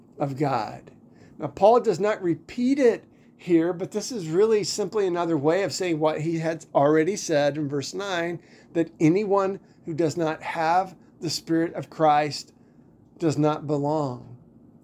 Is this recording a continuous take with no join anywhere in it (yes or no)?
yes